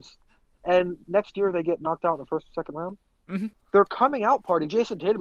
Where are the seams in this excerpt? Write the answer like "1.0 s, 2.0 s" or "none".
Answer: 3.5 s